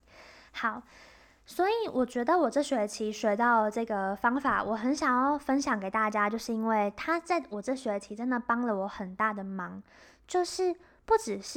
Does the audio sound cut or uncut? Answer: uncut